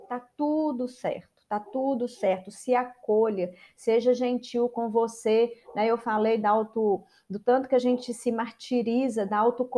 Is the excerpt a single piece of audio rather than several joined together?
yes; 0 cuts

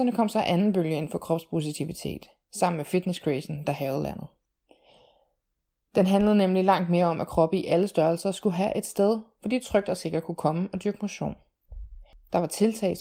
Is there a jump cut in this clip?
no; 0 cuts

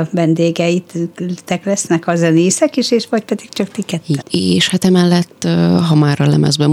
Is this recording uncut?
no; 1 cut; at 4.2 s

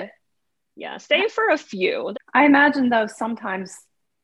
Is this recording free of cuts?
no; 1 cut; at 2.1 s

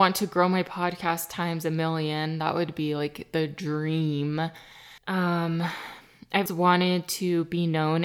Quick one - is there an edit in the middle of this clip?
yes; 2 cuts; at 5.0 s, 6.5 s

